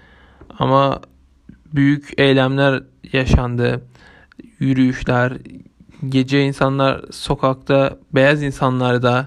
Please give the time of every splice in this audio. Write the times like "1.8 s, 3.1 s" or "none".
none